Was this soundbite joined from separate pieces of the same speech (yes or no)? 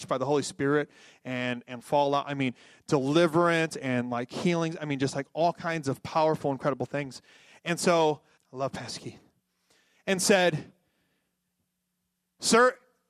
yes